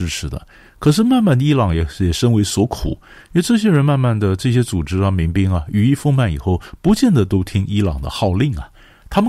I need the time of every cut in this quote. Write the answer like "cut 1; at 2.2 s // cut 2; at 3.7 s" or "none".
none